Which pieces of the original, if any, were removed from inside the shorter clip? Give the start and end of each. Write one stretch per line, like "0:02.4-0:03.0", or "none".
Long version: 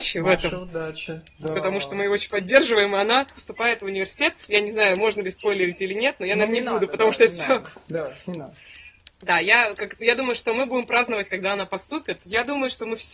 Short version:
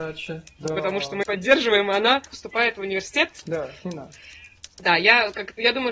0:02.0-0:02.3
0:04.5-0:07.8